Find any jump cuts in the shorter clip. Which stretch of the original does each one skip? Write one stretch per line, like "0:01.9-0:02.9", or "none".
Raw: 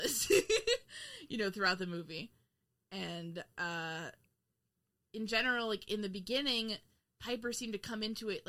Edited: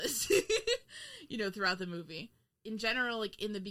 0:02.5-0:05.0